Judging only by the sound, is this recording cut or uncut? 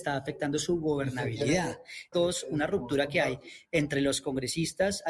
cut